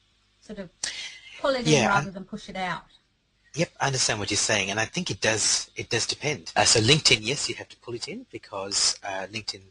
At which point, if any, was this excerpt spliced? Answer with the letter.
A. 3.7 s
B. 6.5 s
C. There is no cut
B